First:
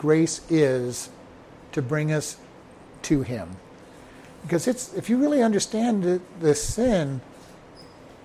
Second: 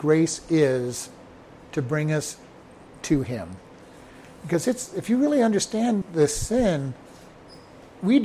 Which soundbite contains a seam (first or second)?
second